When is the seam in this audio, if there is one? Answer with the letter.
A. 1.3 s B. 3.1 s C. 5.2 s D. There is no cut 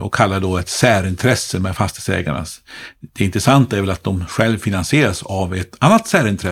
D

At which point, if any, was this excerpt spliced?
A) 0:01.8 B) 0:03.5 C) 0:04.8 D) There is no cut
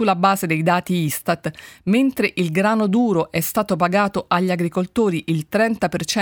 D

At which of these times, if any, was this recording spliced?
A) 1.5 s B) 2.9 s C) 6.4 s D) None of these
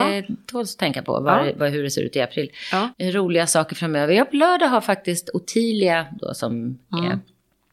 B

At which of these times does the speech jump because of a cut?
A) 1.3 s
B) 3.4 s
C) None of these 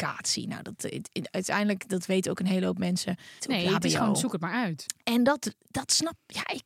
B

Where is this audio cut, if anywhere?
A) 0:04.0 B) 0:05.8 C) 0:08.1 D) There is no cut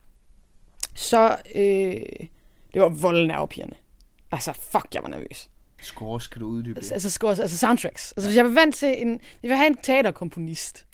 B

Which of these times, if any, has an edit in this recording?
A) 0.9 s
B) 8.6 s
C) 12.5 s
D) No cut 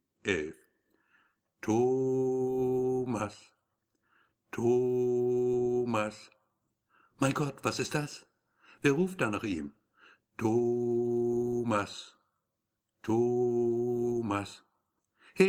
D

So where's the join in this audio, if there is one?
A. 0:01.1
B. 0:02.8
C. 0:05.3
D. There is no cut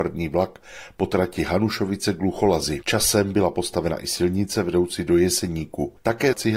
B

